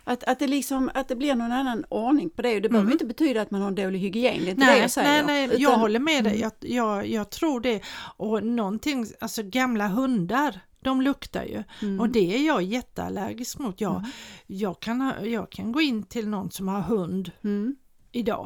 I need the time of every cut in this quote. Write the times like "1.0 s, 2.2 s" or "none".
5.5 s